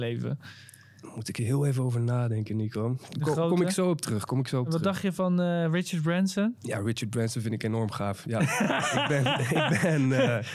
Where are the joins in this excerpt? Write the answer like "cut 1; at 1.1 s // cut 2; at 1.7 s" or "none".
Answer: none